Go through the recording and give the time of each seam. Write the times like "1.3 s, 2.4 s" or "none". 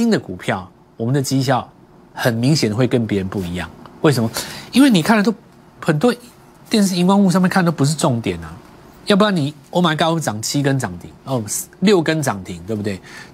none